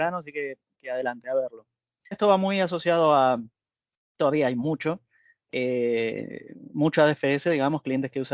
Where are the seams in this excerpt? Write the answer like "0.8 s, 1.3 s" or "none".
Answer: 2.1 s